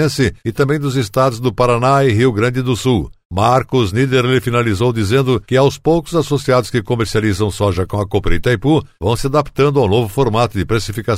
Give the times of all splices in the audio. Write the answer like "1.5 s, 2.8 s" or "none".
none